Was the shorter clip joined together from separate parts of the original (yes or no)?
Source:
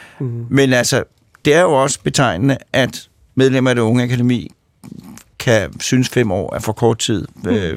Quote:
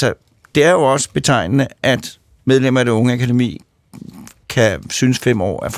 no